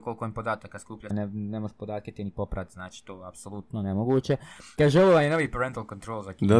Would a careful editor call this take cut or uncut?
cut